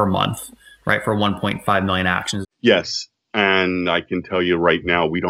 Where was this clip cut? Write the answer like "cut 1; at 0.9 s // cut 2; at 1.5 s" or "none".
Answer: cut 1; at 2.4 s